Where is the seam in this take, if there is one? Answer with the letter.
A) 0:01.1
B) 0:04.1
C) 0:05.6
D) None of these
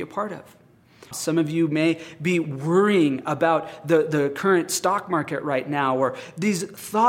A